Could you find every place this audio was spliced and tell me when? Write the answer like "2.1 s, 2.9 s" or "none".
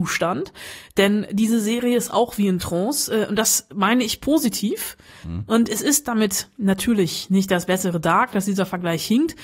8.3 s